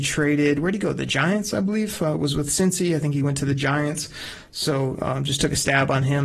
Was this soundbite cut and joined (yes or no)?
no